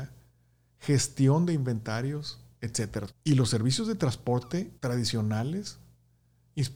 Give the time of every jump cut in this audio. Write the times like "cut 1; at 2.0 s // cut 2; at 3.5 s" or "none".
cut 1; at 3.1 s // cut 2; at 4.8 s